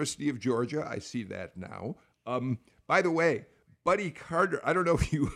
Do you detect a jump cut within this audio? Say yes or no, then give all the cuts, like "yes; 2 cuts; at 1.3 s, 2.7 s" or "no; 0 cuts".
no; 0 cuts